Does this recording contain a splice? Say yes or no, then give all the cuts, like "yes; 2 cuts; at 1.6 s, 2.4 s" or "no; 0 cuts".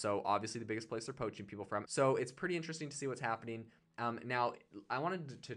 yes; 1 cut; at 1.8 s